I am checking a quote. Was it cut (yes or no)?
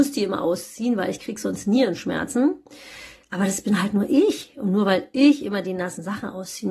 no